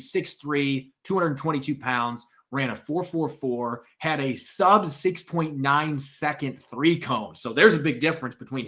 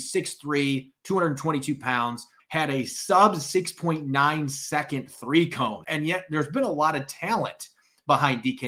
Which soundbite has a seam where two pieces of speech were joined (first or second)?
second